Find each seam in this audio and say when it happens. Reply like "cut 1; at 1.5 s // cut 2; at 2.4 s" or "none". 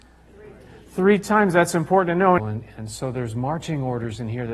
cut 1; at 2.4 s